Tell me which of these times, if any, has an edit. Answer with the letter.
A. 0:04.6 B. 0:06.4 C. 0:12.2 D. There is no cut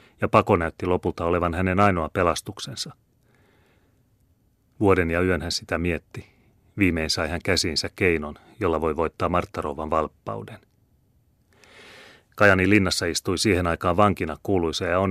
D